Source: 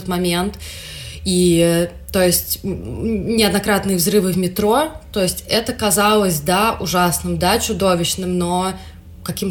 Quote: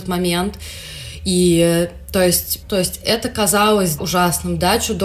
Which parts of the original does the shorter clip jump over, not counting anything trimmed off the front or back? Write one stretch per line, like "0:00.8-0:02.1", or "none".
0:02.6-0:05.1
0:06.4-0:06.8